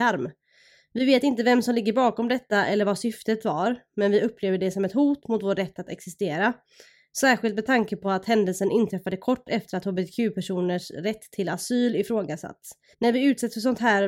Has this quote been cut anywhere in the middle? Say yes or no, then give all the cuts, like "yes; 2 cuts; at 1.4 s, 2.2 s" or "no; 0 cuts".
yes; 1 cut; at 12.9 s